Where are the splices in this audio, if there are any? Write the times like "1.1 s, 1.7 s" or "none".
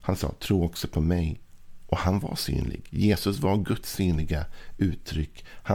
none